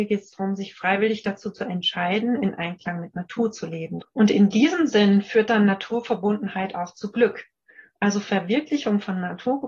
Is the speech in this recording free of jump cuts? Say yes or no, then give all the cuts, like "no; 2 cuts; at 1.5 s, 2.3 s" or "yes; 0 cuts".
no; 1 cut; at 4.0 s